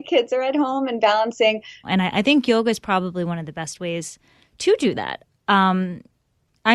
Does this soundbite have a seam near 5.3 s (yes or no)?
no